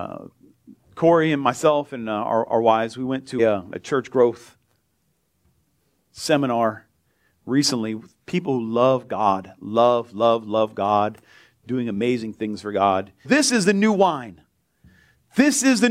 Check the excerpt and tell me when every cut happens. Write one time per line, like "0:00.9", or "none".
0:03.4
0:13.2